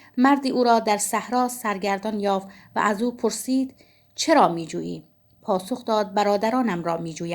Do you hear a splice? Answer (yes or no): no